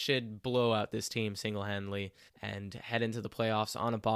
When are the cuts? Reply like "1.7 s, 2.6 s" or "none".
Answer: 2.3 s